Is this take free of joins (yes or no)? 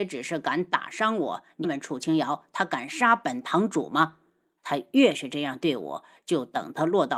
no